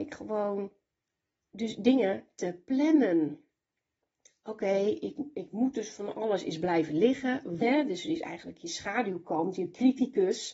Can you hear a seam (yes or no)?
yes